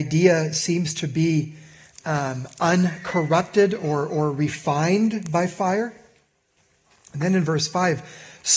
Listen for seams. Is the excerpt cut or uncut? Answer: uncut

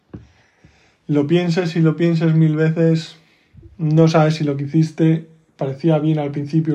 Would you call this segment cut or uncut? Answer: uncut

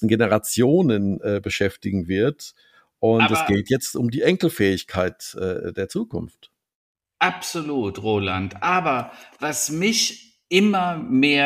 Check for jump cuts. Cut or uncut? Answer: uncut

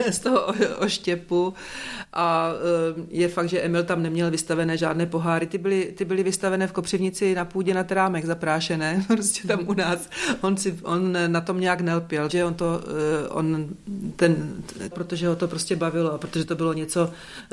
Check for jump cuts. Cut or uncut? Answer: cut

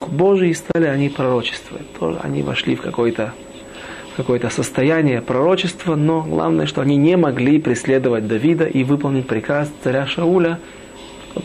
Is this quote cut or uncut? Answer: uncut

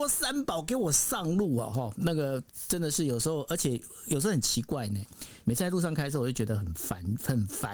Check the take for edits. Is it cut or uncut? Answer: cut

